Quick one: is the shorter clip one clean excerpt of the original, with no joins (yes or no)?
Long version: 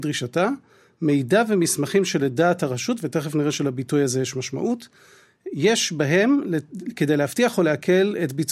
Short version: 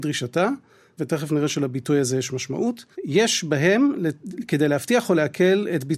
no